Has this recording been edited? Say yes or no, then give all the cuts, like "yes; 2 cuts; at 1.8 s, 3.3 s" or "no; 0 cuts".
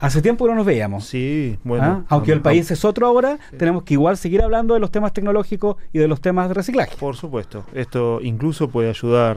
no; 0 cuts